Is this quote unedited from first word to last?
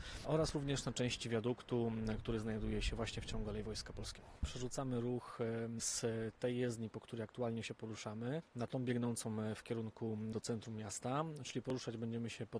no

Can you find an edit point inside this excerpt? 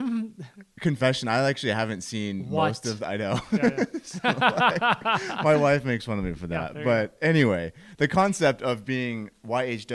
no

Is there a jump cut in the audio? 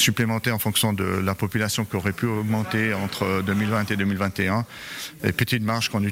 no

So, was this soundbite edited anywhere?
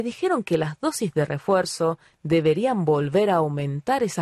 no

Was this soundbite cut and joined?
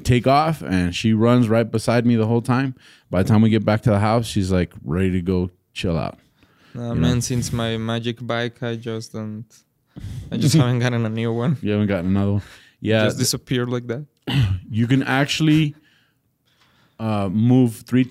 no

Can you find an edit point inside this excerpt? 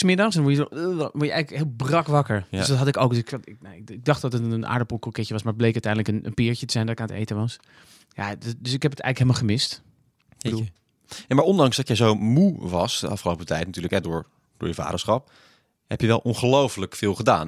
no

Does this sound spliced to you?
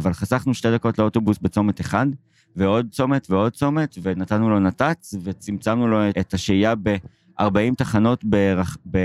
yes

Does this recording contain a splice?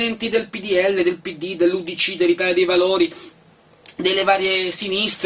no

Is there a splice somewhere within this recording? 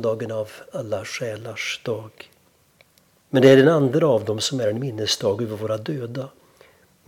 yes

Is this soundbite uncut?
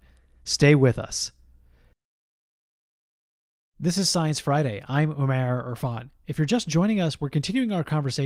yes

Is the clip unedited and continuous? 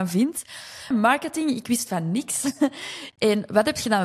no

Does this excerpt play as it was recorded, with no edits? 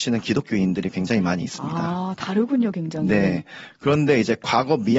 yes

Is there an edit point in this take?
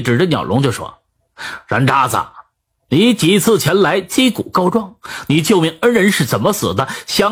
no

